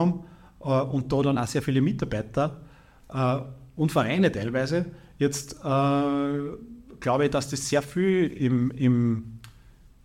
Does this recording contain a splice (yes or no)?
no